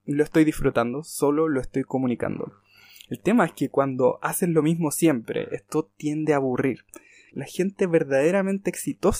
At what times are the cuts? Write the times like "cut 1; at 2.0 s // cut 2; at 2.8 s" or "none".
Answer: cut 1; at 7.3 s